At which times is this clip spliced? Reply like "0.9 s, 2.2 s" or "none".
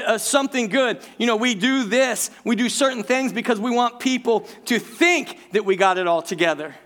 none

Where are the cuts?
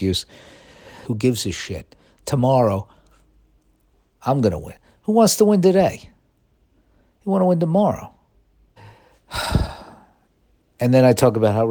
1.0 s, 8.8 s

